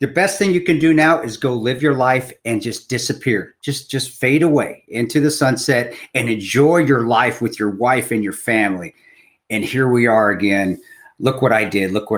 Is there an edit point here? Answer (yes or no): no